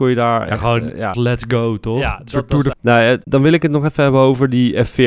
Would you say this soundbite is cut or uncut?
cut